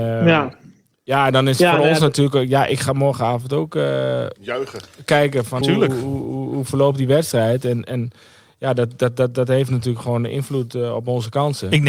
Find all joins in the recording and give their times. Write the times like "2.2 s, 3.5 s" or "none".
5.6 s